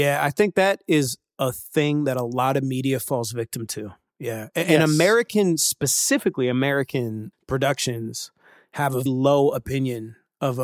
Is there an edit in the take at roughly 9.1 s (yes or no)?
yes